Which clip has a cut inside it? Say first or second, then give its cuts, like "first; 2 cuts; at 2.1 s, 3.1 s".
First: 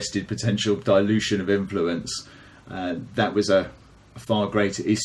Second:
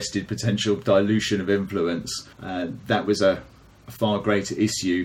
second; 1 cut; at 2.3 s